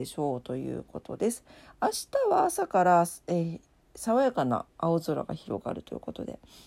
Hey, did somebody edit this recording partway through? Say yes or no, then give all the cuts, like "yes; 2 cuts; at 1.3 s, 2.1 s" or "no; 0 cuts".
no; 0 cuts